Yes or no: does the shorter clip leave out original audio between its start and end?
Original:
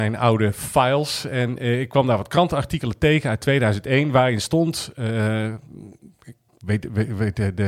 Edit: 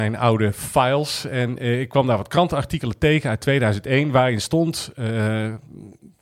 no